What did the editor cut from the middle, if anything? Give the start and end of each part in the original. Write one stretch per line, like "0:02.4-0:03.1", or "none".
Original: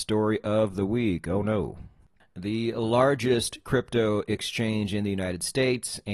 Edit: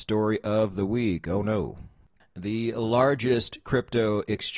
none